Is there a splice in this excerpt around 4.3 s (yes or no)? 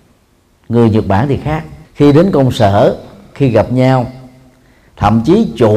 no